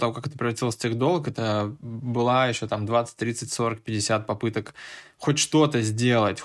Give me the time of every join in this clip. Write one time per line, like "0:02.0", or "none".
none

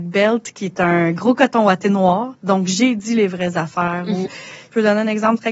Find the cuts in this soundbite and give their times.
0:02.3
0:04.3

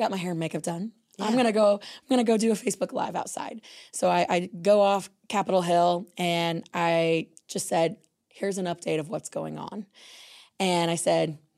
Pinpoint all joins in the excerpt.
none

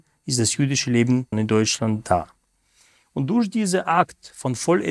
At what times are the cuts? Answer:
0:01.3

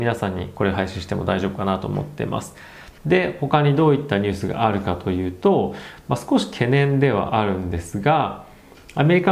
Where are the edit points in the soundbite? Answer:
0:03.0

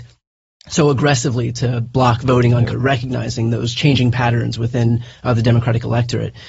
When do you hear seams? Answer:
0:02.7

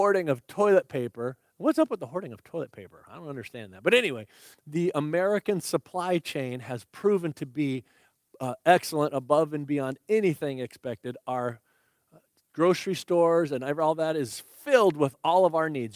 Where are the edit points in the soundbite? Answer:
0:04.5

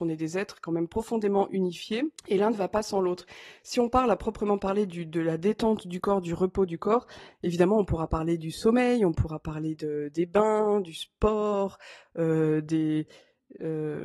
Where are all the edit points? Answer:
0:02.2

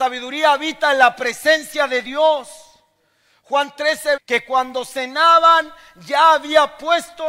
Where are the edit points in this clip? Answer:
0:04.2

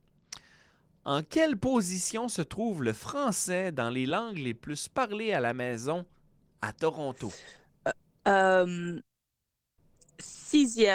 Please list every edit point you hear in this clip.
none

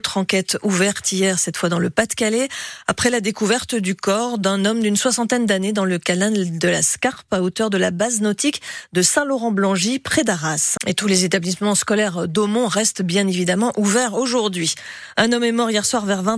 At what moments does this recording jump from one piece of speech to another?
0:10.8

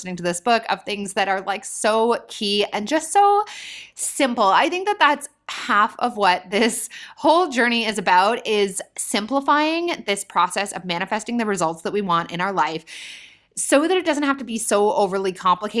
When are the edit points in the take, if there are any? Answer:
none

